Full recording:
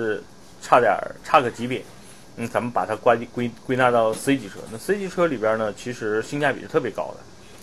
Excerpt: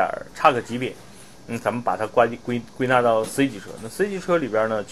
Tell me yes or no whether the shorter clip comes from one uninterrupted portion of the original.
yes